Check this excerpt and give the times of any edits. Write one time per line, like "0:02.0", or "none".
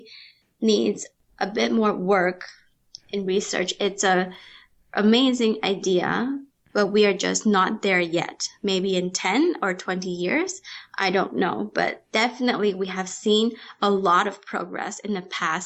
none